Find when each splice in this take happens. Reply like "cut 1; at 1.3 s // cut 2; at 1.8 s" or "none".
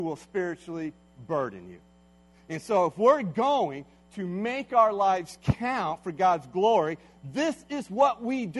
none